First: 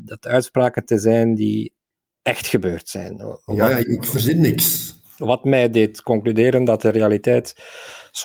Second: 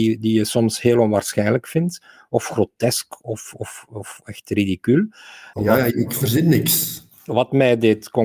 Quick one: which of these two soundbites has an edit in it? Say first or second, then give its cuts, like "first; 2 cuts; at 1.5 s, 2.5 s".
second; 1 cut; at 5.5 s